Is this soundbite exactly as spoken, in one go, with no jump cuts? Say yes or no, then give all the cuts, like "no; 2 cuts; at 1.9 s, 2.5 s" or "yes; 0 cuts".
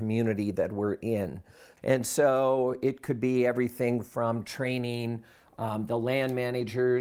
yes; 0 cuts